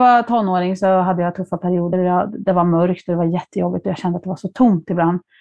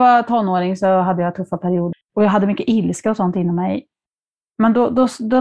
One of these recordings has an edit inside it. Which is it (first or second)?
second